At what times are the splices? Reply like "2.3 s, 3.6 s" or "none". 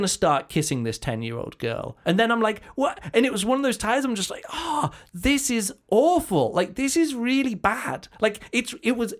2.0 s